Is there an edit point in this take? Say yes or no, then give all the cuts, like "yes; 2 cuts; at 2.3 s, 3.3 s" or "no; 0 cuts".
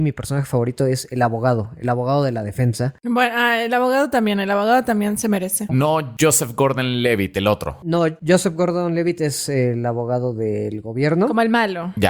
yes; 1 cut; at 5.7 s